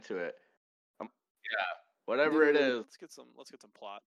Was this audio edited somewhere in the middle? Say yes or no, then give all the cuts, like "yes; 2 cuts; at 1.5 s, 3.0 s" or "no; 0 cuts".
yes; 2 cuts; at 1.0 s, 2.8 s